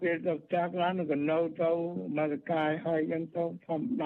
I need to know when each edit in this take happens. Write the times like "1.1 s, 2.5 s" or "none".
none